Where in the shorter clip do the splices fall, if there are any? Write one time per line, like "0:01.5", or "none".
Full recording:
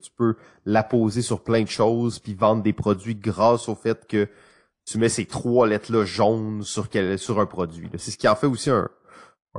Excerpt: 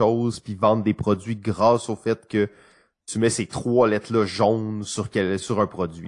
none